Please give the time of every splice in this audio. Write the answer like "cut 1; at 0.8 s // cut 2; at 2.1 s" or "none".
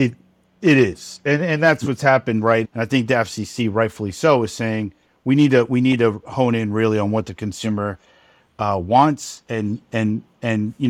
cut 1; at 2.6 s